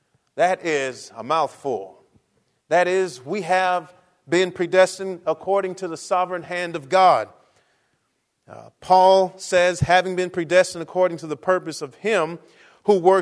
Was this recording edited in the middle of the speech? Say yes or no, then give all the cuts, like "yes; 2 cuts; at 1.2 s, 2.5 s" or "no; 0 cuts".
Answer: yes; 1 cut; at 2.6 s